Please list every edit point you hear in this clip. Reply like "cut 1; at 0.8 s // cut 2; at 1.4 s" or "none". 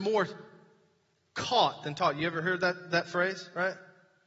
none

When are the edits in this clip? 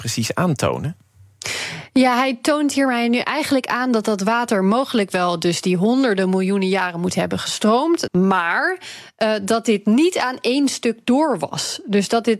cut 1; at 8.1 s

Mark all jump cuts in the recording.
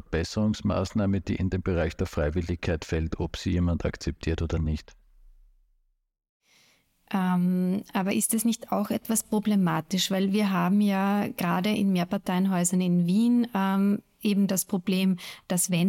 none

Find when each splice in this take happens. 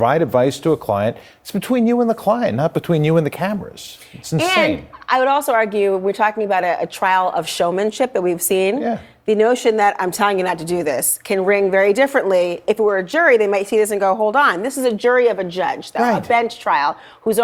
none

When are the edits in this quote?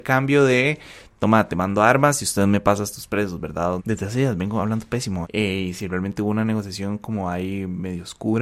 cut 1; at 3.8 s // cut 2; at 5.2 s

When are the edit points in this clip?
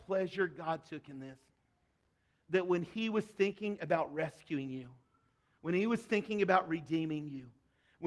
none

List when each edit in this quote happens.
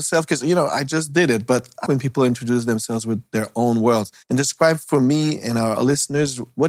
cut 1; at 1.8 s // cut 2; at 4.2 s

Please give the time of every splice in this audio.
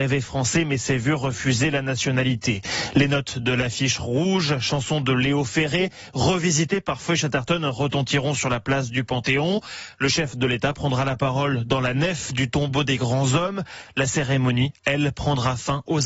none

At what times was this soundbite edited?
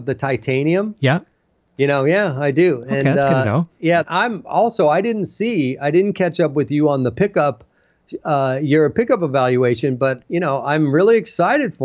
cut 1; at 4.0 s

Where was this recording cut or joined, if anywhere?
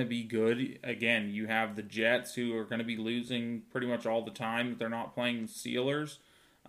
none

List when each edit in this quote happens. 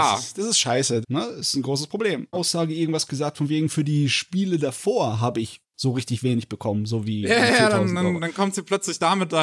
cut 1; at 1.0 s // cut 2; at 2.3 s

